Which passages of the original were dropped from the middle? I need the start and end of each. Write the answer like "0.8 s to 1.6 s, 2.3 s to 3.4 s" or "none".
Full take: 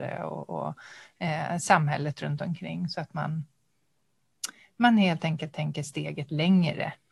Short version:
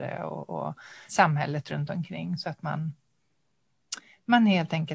1.1 s to 1.6 s